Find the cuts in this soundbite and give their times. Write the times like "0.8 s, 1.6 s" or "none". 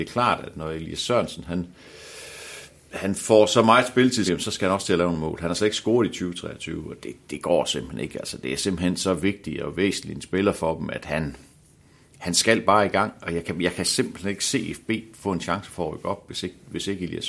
4.3 s